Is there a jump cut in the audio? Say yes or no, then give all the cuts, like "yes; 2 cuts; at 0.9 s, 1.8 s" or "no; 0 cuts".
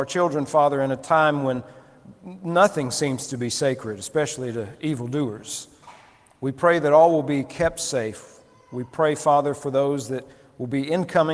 no; 0 cuts